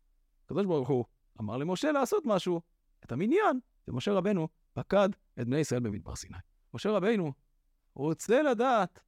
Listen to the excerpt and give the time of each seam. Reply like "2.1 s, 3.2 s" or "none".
6.7 s